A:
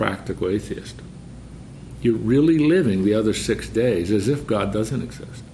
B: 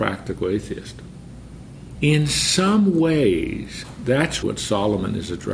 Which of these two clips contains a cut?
B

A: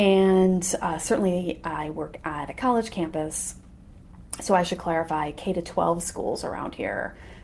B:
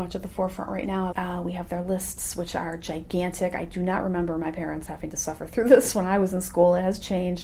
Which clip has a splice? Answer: B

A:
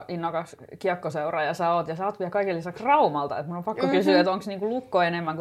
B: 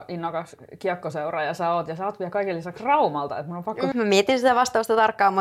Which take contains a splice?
B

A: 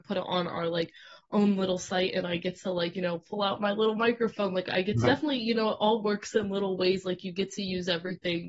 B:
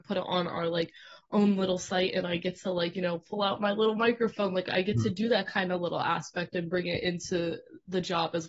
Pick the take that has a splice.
A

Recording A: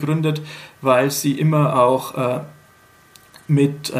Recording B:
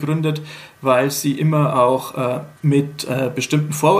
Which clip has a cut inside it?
B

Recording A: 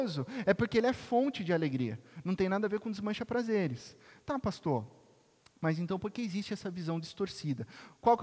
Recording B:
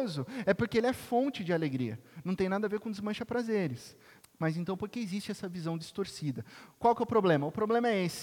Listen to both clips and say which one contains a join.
B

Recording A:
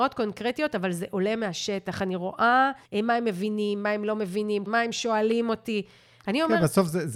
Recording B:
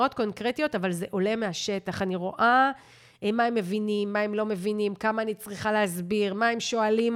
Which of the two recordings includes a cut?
A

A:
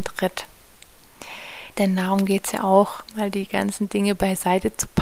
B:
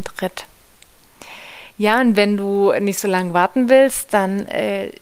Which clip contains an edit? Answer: A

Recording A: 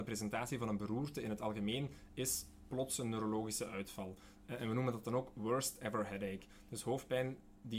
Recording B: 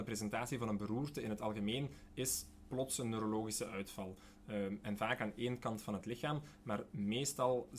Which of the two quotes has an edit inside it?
A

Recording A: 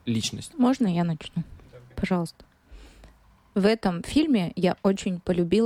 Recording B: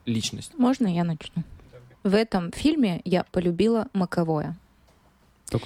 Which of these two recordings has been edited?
B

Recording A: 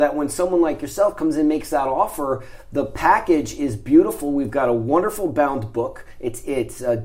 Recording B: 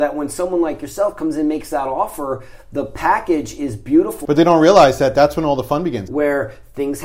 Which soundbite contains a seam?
B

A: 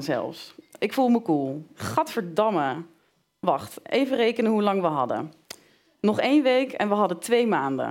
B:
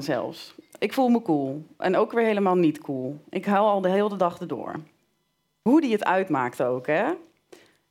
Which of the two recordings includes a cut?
A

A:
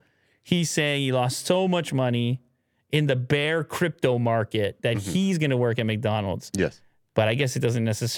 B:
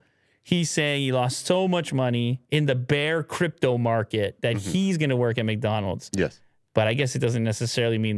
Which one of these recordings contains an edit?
B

